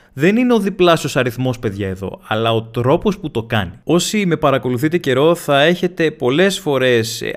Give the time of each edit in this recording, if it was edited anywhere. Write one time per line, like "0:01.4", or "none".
none